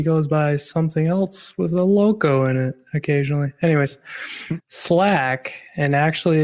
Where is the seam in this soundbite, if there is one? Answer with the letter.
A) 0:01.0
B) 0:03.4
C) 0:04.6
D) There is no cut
C